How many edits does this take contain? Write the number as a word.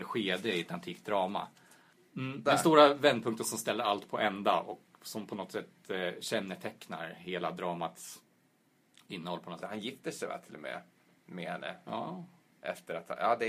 two